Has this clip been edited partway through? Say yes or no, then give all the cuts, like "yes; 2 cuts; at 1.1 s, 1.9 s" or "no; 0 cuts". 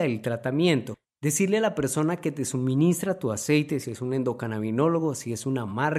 yes; 1 cut; at 3.8 s